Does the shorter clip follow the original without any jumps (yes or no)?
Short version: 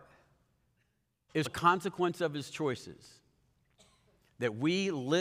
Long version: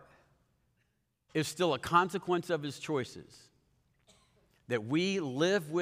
no